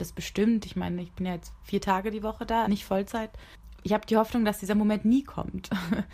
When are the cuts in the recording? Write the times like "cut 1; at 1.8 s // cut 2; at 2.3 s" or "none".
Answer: cut 1; at 2.6 s // cut 2; at 3.7 s